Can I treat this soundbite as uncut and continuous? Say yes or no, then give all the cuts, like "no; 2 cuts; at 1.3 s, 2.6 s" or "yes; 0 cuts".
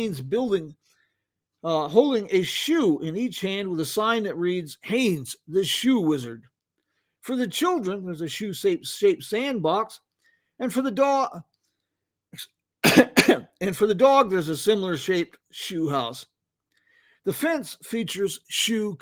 yes; 0 cuts